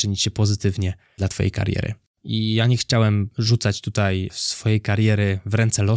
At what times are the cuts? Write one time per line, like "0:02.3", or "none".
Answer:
0:02.2